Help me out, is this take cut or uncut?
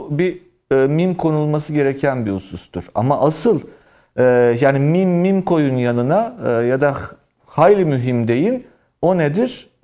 uncut